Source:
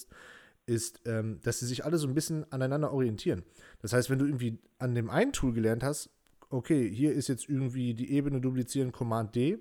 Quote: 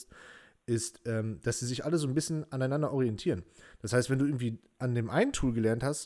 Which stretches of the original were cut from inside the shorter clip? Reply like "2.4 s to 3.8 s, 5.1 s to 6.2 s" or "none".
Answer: none